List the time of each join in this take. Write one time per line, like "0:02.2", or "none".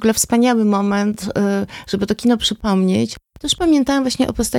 none

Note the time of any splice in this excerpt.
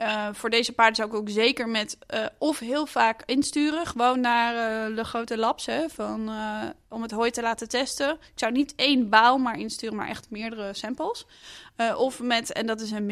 none

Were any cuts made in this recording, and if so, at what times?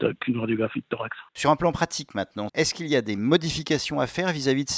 0:01.3
0:02.5

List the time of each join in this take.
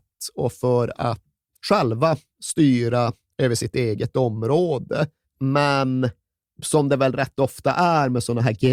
0:01.5
0:05.2

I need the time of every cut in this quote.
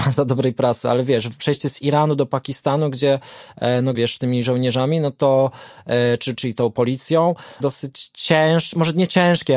0:03.9
0:06.4
0:07.6

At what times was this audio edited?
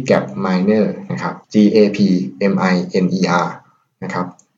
0:01.4

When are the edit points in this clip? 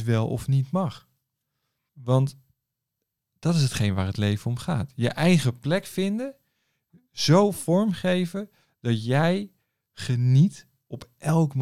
0:01.9

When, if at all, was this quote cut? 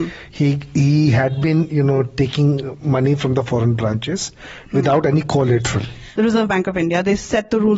0:06.2

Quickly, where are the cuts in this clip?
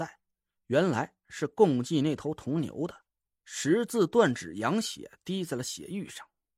0:03.3

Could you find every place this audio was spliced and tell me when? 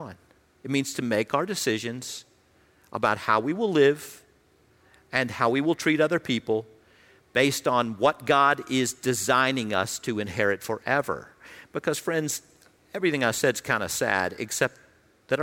none

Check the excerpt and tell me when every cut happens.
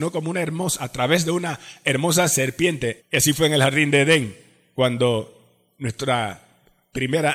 0:03.0

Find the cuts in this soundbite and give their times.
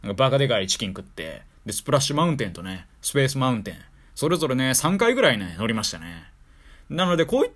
none

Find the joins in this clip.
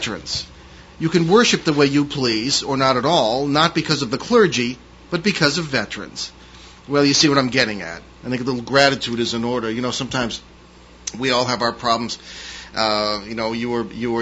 none

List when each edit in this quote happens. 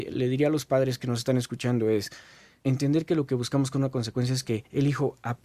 0:02.6

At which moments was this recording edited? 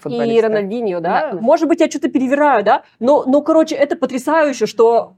0:01.3

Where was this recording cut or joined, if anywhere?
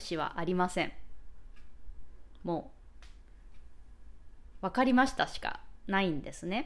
none

